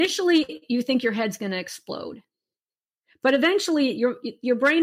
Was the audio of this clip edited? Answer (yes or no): no